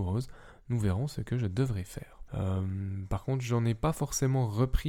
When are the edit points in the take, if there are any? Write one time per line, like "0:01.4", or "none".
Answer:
0:02.3